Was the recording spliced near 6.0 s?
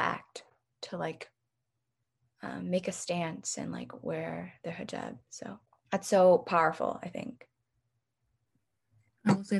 no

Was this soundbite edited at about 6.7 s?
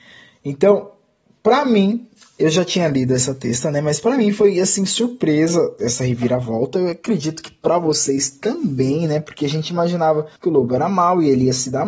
no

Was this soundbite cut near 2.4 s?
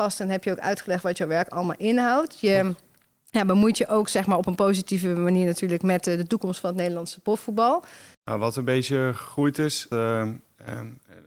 no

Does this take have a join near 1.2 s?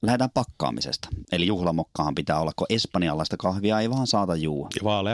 yes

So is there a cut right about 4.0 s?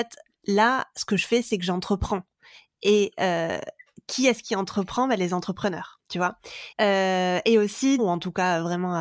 no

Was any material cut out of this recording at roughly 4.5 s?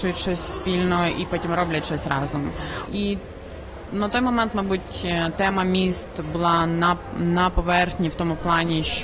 no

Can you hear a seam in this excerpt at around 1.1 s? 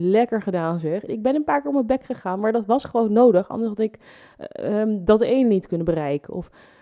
yes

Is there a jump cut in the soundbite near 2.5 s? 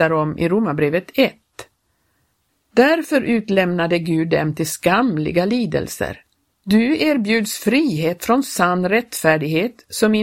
yes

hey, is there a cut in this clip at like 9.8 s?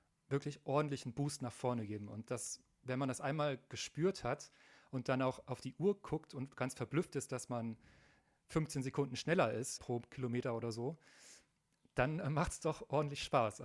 yes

